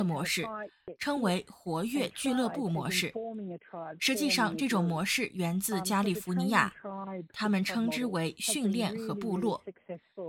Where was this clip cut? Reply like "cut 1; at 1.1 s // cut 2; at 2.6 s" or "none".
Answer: cut 1; at 7.3 s